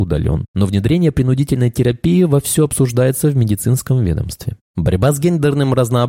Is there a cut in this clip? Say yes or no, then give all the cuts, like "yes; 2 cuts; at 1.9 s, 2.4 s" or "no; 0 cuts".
no; 0 cuts